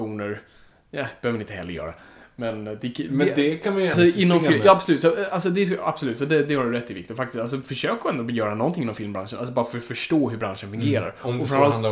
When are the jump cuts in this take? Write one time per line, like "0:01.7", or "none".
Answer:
0:03.9